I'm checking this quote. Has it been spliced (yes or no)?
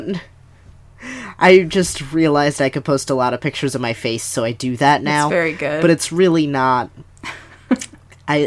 no